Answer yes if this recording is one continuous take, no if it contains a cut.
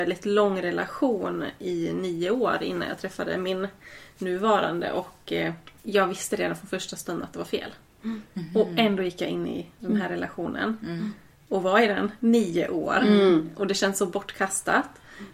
no